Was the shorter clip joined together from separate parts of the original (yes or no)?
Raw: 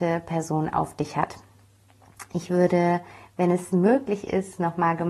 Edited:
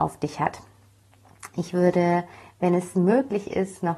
no